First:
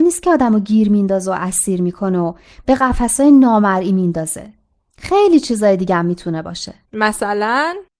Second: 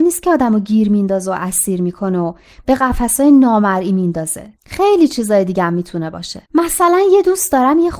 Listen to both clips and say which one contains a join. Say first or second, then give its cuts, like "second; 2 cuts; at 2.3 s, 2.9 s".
second; 2 cuts; at 4.6 s, 6.5 s